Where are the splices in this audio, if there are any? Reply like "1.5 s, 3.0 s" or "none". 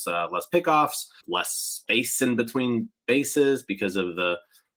1.2 s